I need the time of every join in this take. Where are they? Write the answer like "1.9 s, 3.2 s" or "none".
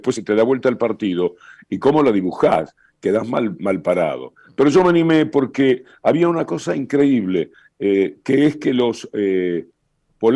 none